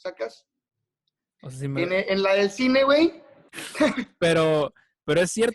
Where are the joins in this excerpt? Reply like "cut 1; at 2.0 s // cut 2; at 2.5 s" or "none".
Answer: cut 1; at 3.5 s

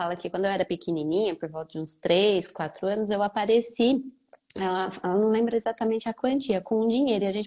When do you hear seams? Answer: none

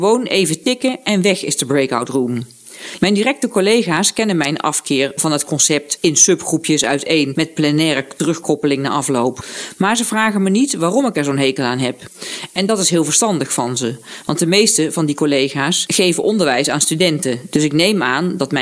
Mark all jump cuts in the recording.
cut 1; at 3.0 s // cut 2; at 17.5 s

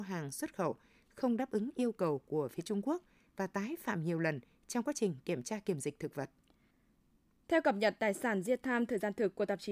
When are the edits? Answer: none

